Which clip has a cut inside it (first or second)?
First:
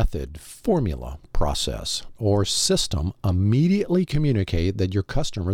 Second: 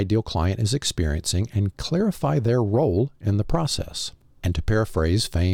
first